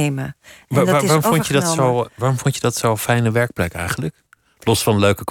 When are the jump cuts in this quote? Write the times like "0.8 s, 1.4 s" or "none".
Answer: none